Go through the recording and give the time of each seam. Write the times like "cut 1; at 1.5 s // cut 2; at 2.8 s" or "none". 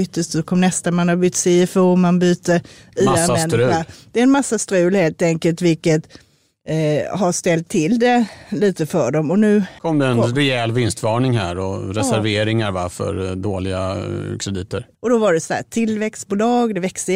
cut 1; at 9.8 s // cut 2; at 14.9 s